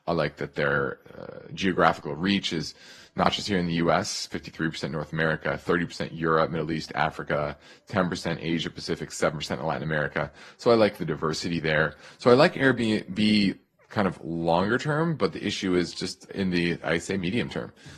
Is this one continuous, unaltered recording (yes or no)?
no